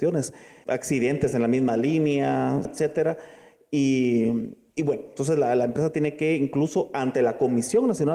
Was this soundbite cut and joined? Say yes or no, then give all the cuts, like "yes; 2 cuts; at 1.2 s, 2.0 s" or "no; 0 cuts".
yes; 1 cut; at 2.7 s